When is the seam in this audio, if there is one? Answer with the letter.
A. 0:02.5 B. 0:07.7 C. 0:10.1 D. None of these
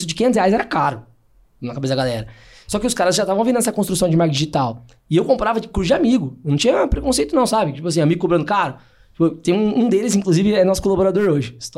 D